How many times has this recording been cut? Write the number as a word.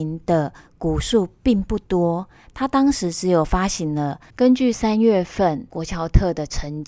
one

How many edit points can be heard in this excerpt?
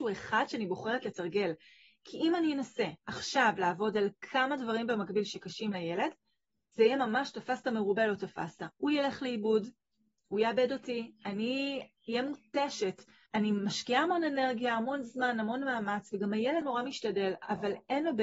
two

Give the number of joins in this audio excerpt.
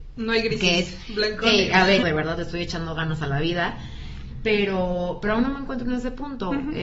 one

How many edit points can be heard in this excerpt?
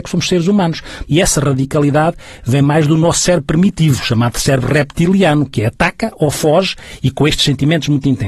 one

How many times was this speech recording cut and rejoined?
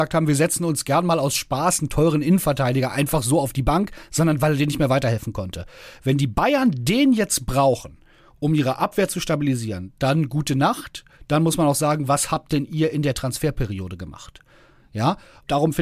zero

